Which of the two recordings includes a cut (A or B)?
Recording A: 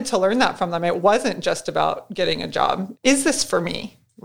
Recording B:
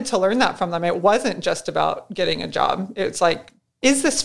A